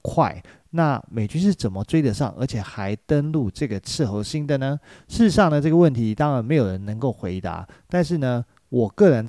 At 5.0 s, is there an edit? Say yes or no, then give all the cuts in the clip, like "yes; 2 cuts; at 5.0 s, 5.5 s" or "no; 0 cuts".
no; 0 cuts